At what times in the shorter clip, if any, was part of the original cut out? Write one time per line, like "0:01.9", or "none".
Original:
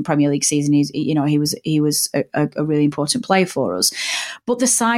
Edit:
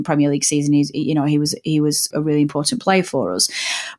0:02.1